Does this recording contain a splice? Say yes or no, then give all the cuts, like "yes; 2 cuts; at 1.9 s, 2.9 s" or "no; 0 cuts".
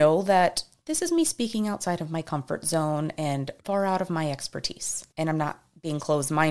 no; 0 cuts